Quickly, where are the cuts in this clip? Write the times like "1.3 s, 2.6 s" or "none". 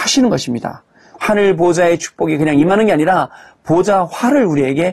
1.2 s